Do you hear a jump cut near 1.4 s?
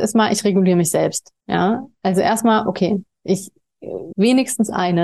yes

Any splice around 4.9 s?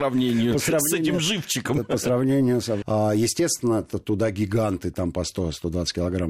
no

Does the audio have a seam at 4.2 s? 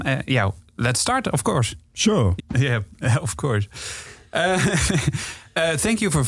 no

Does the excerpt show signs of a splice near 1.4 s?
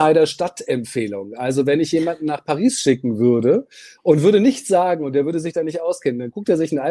no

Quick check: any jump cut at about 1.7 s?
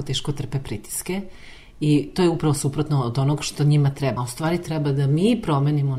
no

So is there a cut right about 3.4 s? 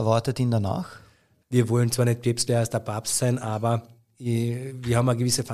no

